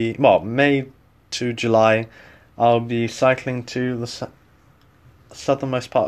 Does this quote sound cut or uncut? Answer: uncut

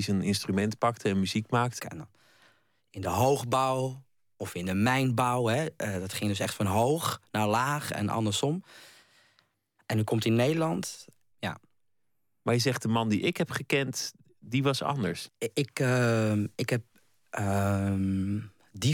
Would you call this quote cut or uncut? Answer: cut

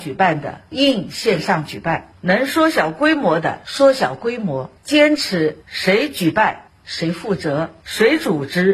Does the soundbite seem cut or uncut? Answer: uncut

